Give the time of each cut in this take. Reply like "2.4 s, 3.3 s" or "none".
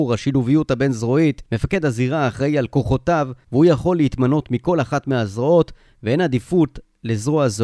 1.5 s, 3.4 s